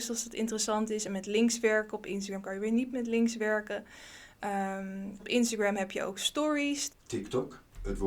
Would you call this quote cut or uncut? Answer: cut